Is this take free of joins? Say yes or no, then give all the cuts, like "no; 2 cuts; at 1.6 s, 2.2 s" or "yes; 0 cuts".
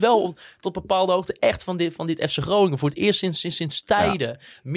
yes; 0 cuts